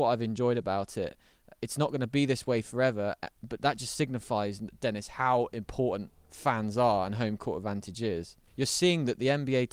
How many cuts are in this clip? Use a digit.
1